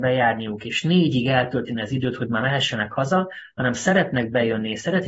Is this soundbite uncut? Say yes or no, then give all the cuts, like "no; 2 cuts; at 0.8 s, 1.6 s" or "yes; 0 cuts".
yes; 0 cuts